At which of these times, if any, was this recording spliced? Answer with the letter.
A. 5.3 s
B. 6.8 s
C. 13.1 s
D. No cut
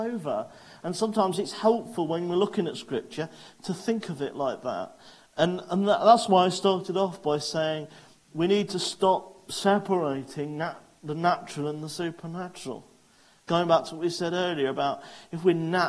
D